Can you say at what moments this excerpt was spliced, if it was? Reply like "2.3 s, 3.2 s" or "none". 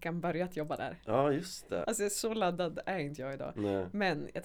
1.8 s